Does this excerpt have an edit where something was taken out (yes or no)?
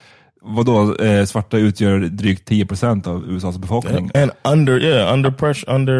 yes